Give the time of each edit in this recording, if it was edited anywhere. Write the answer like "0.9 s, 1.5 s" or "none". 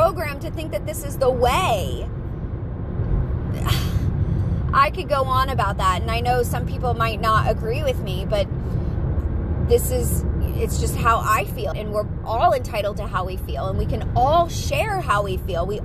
11.7 s